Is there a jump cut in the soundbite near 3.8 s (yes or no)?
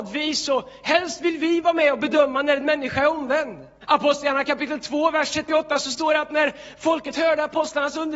yes